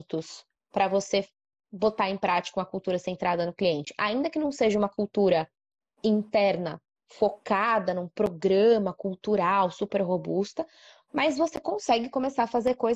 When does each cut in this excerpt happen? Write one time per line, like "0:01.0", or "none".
none